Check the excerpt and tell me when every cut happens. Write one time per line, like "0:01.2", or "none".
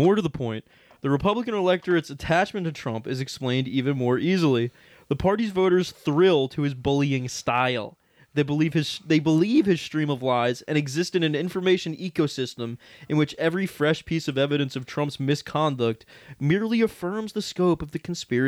none